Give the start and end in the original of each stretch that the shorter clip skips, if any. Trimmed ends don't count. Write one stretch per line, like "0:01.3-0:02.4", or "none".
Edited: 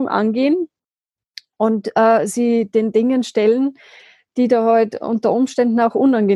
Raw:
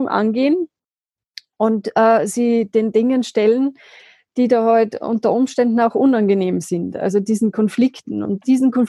none